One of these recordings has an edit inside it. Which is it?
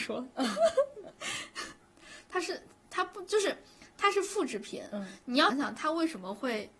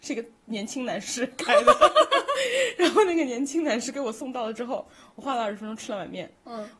first; 1 cut; at 5.5 s

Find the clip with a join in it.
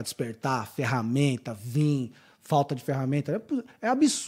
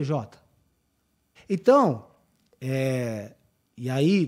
second; 1 cut; at 1.4 s

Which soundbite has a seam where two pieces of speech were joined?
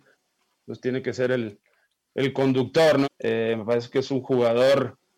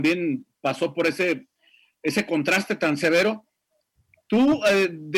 first; 1 cut; at 3.0 s

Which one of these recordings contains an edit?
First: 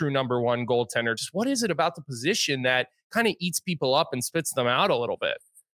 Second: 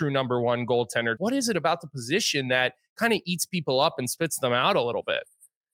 second; 1 cut; at 1.2 s

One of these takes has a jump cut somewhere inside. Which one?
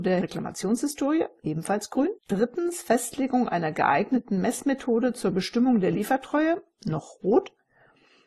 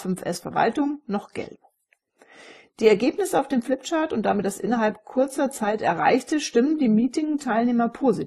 first; 1 cut; at 2.2 s

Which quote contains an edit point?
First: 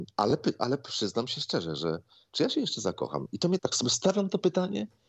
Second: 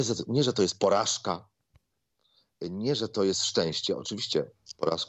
first; 1 cut; at 3.6 s

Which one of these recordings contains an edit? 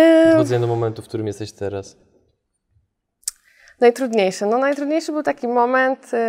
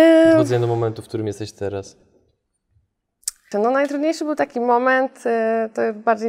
second; 1 cut; at 3.5 s

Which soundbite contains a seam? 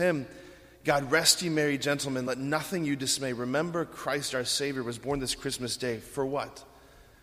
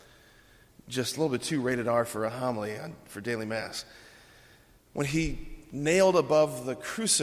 second; 1 cut; at 4.8 s

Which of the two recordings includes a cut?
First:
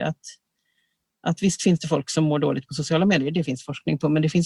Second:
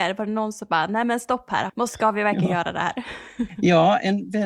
second; 1 cut; at 1.7 s

